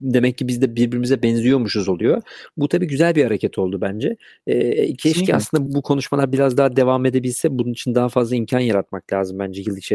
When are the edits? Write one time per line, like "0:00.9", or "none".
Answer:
0:05.7